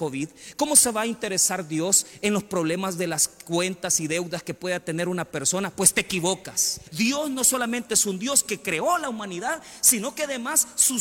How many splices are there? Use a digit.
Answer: 0